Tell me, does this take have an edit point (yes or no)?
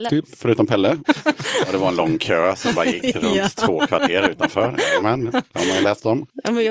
yes